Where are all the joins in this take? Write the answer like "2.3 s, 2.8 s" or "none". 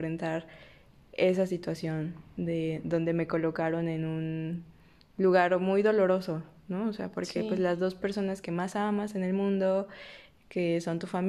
none

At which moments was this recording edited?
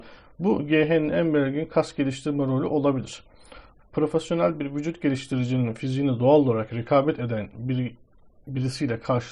3.8 s

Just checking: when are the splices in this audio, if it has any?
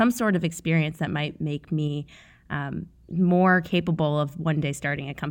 none

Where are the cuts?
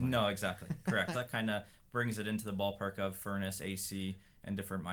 1.1 s

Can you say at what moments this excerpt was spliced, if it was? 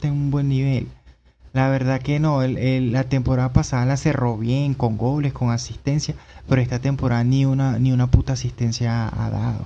none

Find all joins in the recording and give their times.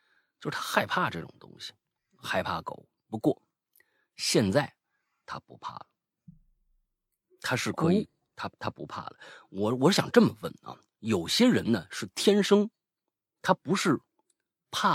3.0 s

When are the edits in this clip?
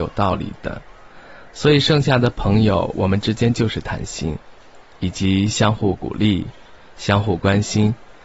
none

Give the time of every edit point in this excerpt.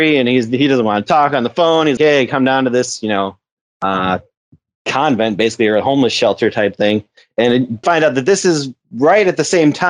2.0 s, 7.8 s

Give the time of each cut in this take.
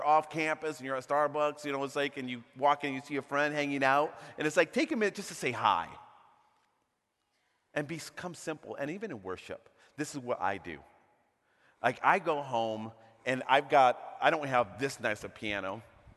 none

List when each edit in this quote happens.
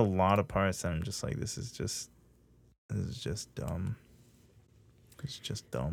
none

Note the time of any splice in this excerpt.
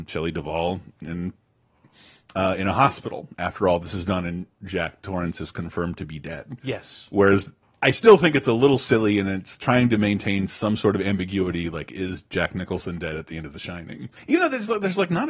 14.2 s

